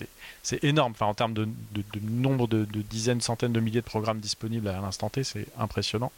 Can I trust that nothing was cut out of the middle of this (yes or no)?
yes